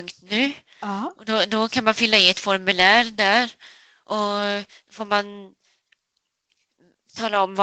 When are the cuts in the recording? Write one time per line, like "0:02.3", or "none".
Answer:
none